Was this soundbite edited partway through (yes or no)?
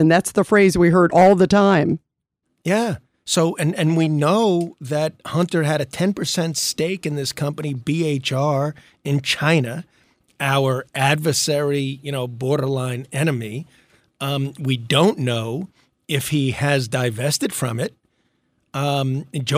no